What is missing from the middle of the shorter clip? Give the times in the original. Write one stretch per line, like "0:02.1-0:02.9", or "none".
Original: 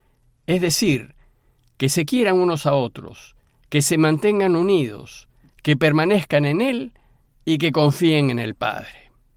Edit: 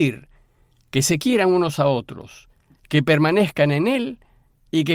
0:03.6-0:05.4